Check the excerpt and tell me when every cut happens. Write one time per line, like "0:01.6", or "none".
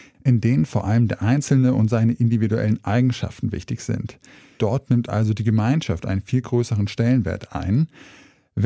0:04.6